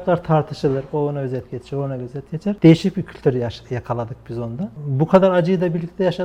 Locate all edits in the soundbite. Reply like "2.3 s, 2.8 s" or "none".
none